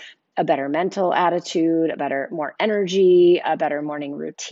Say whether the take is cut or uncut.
uncut